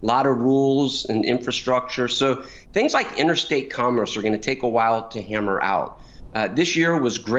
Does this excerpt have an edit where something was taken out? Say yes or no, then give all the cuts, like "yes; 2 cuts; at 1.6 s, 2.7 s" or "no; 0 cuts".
no; 0 cuts